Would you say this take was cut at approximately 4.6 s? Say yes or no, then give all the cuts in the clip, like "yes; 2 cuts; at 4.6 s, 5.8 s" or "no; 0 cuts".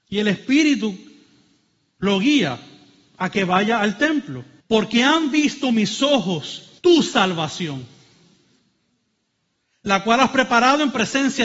yes; 2 cuts; at 4.6 s, 6.8 s